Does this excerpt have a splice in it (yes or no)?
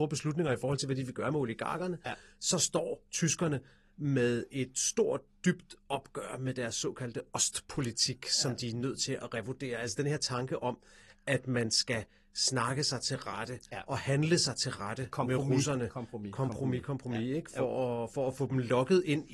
no